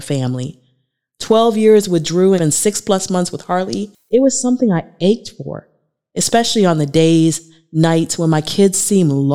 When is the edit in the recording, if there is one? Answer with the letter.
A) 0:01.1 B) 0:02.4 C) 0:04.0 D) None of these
B